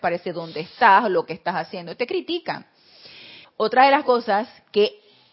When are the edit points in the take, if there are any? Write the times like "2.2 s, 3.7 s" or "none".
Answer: 3.4 s